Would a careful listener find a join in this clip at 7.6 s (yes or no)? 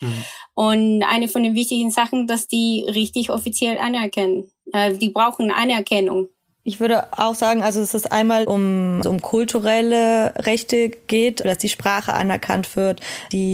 no